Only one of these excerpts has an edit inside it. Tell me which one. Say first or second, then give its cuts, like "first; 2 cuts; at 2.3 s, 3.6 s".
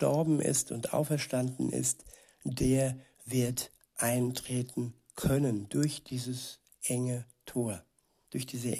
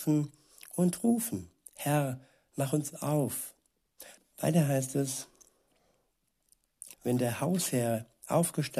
second; 2 cuts; at 4.2 s, 6.9 s